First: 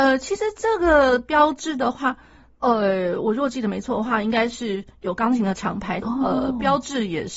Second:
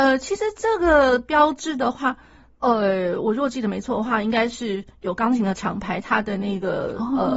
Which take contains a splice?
first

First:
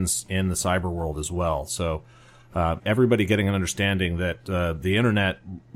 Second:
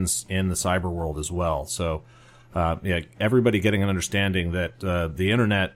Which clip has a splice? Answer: first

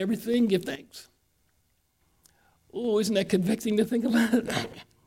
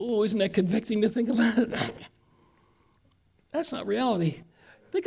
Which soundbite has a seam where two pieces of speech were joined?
second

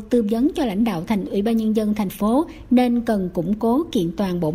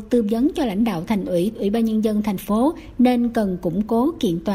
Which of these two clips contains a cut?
first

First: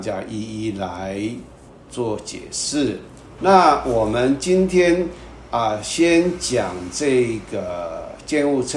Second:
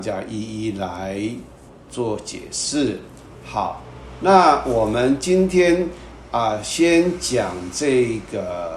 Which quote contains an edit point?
first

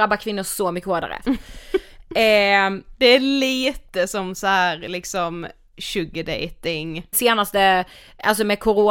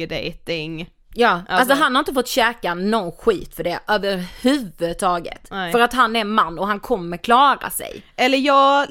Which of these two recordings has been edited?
first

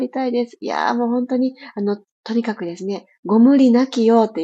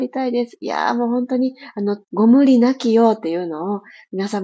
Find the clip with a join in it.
second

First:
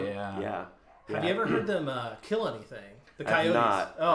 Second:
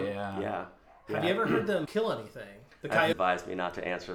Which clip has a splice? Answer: second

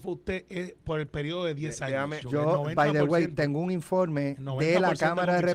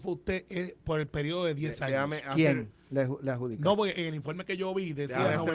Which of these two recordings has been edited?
first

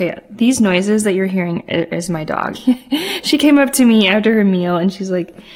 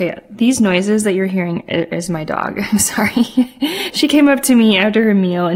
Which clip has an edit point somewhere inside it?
first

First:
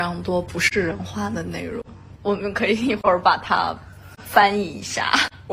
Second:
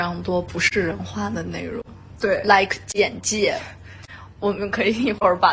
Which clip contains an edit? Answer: first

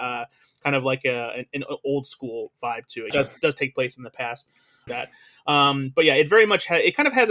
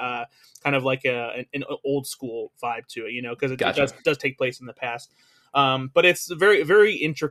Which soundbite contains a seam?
first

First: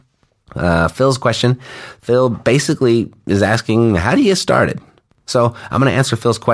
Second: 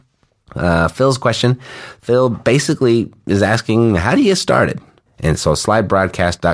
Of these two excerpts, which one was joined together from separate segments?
second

